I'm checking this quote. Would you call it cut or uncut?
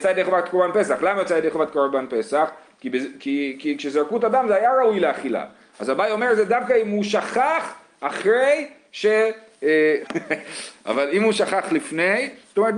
cut